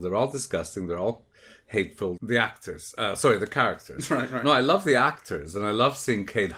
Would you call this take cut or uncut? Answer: cut